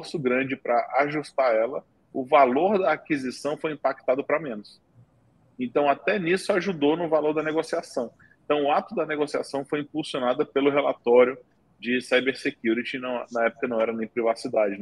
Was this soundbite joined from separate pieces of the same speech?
no; 0 cuts

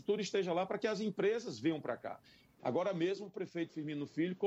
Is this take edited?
yes; 1 cut; at 2.6 s

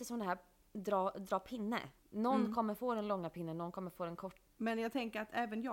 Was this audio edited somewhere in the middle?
yes; 2 cuts; at 2.0 s, 4.5 s

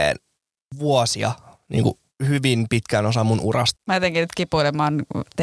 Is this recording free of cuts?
no; 1 cut; at 3.8 s

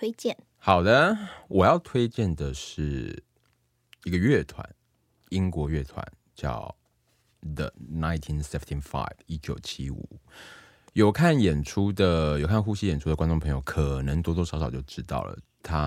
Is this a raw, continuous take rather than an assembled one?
yes; 0 cuts

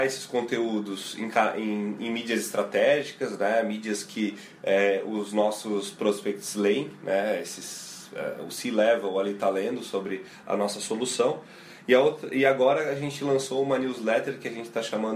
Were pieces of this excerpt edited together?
no; 0 cuts

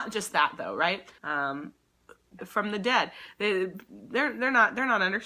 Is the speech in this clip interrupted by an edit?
yes; 2 cuts; at 1.2 s, 2.4 s

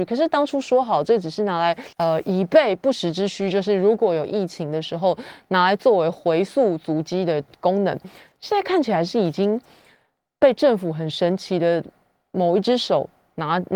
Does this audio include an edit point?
yes; 1 cut; at 1.9 s

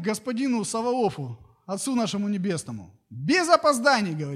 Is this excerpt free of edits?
yes; 0 cuts

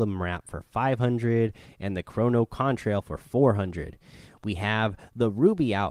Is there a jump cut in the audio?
no; 0 cuts

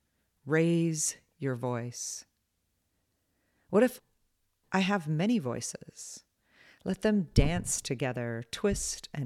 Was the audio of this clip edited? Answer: no; 0 cuts

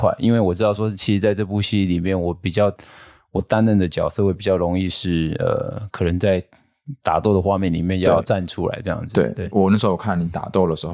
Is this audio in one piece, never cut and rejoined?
yes; 0 cuts

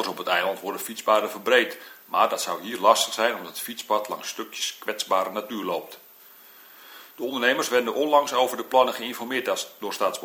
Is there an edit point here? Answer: no; 0 cuts

